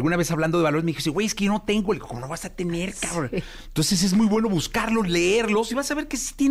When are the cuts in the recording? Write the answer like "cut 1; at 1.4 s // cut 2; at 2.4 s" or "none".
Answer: none